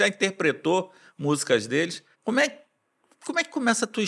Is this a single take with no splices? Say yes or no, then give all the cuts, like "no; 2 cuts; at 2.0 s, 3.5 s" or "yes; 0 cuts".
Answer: no; 1 cut; at 2.1 s